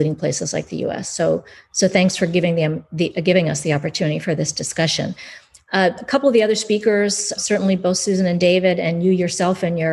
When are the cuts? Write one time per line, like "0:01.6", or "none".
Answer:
0:07.4